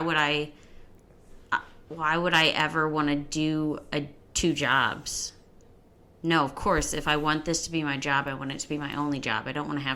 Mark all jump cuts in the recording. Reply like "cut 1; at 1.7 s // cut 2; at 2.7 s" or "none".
none